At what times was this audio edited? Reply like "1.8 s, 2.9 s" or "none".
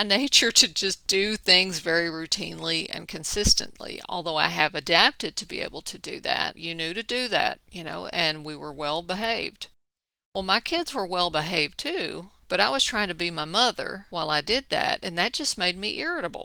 6.6 s